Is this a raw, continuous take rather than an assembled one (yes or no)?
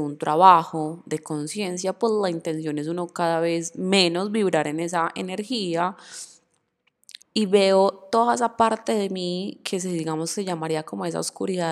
no